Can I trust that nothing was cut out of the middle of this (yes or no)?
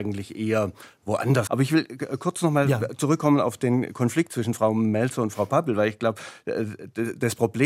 no